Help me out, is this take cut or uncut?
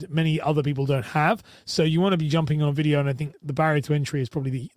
uncut